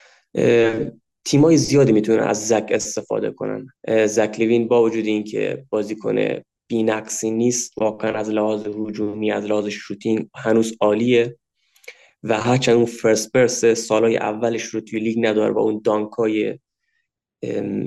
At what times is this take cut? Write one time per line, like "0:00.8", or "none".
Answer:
0:03.8

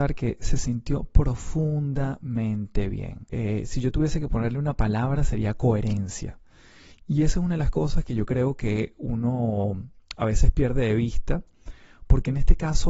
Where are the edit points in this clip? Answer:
0:03.3

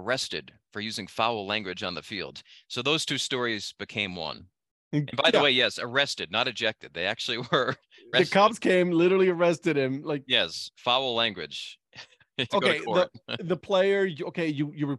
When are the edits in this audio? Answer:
0:08.1
0:12.5

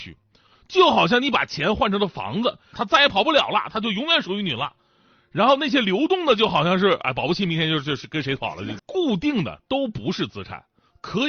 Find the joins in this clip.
0:02.7
0:08.8

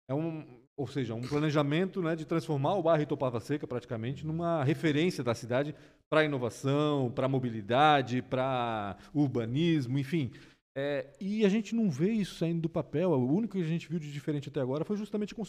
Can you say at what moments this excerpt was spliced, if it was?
none

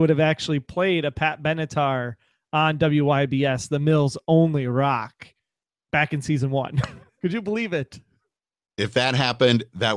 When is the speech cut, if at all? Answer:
0:07.1

